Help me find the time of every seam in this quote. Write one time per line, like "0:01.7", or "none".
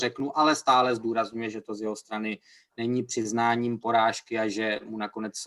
none